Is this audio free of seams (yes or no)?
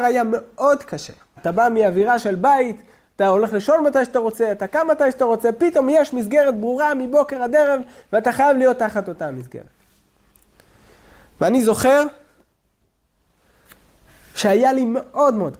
no